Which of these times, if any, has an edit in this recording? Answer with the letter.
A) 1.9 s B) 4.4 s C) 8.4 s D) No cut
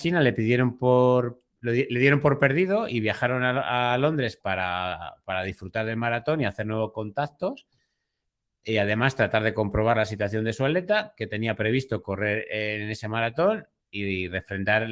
D